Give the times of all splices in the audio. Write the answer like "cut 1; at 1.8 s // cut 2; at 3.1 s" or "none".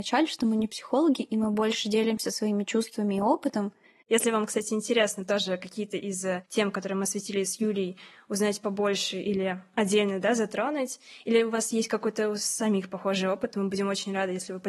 cut 1; at 4.0 s